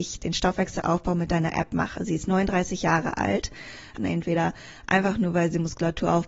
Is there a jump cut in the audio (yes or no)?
yes